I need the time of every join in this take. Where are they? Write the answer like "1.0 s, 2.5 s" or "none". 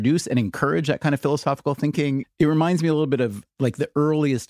2.2 s